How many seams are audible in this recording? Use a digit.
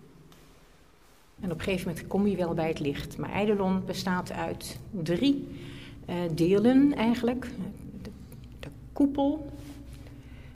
1